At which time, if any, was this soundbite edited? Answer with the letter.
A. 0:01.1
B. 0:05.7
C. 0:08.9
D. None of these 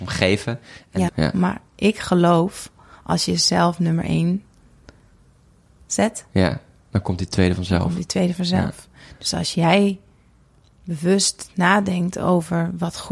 A